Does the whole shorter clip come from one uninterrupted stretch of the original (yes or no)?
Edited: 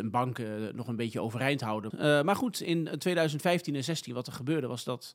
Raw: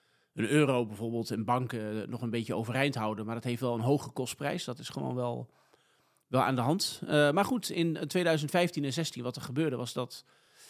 no